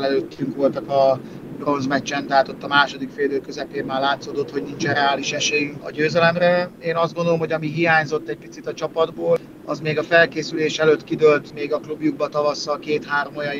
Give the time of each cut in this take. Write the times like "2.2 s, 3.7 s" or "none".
5.8 s